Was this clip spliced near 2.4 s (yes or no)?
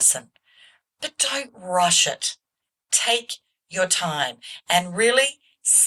no